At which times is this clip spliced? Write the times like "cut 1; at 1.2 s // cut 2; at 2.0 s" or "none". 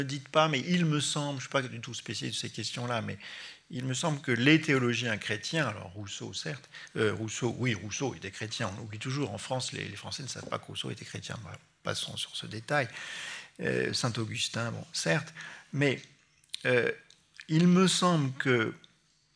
none